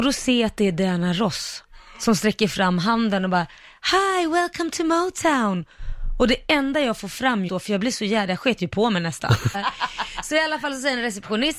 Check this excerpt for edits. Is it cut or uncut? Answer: cut